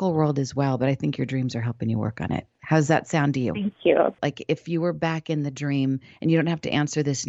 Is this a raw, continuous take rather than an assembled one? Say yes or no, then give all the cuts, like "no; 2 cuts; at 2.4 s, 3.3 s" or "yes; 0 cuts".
no; 1 cut; at 4.2 s